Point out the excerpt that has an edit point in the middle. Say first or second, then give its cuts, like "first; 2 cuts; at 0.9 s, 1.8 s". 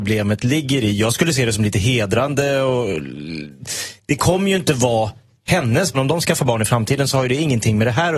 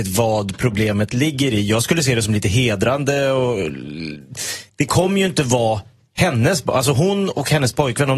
first; 1 cut; at 5.9 s